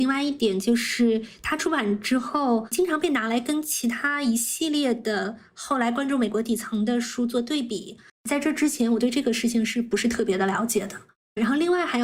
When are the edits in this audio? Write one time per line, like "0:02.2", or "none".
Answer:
0:08.1